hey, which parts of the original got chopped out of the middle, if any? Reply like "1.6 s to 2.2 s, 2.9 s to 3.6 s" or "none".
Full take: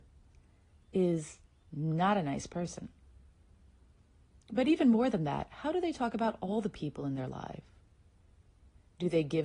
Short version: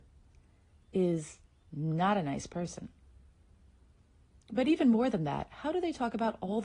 none

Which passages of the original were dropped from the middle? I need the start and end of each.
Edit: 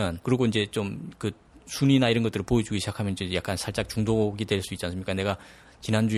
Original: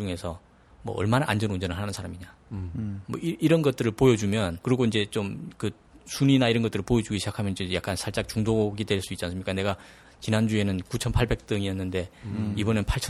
none

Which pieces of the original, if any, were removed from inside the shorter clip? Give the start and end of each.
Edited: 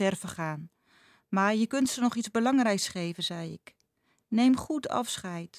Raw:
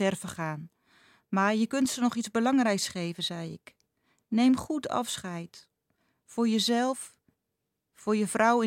none

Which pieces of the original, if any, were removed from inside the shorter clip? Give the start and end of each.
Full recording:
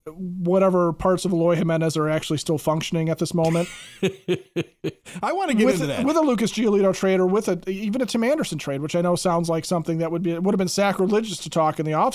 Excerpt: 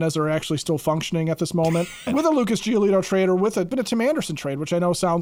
3.9 s to 6.0 s, 7.6 s to 7.9 s

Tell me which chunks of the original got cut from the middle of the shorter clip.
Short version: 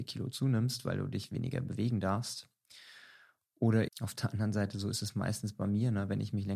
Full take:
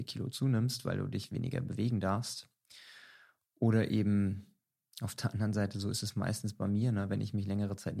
3.9 s to 4.9 s

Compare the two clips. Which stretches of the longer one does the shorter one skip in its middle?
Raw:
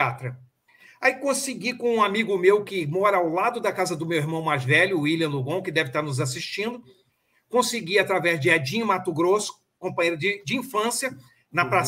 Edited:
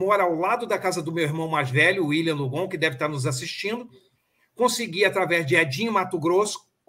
none

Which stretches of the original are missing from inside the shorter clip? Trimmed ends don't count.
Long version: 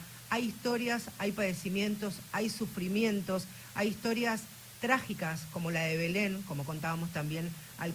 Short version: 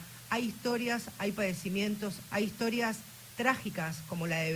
2.3 s to 3.7 s

